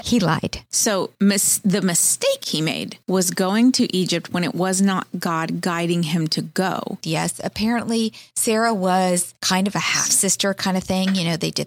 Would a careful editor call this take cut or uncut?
cut